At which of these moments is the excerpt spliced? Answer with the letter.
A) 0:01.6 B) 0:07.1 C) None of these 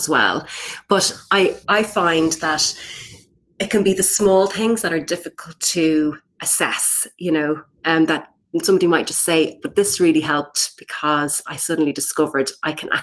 A